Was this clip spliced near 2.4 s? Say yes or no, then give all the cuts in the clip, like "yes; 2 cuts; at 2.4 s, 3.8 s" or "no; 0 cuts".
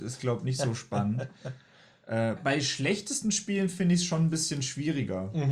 yes; 1 cut; at 2.4 s